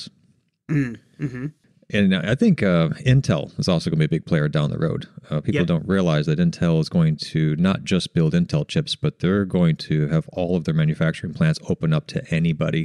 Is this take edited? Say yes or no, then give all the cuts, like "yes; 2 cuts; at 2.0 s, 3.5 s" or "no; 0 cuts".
no; 0 cuts